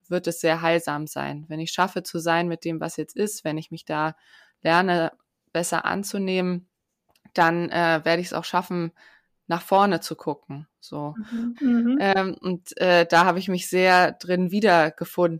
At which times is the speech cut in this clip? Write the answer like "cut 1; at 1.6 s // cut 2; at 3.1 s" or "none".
cut 1; at 11.6 s